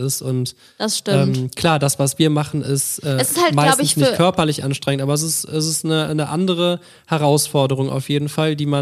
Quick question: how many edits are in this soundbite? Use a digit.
0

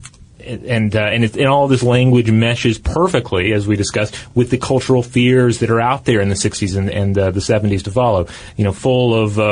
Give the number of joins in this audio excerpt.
0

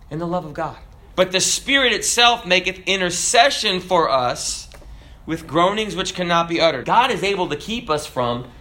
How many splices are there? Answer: 2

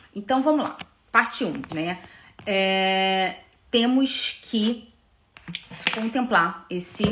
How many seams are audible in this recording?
1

